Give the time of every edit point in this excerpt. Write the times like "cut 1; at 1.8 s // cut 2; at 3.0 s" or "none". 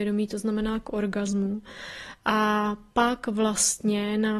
none